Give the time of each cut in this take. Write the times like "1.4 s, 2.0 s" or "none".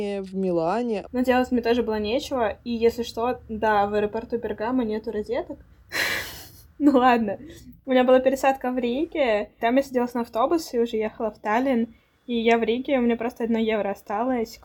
1.0 s